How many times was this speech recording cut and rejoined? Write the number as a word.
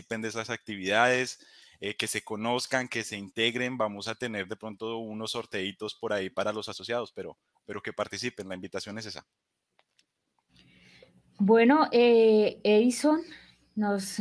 zero